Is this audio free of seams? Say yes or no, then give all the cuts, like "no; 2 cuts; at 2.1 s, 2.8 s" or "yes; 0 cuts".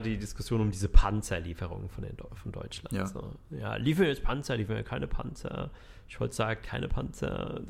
yes; 0 cuts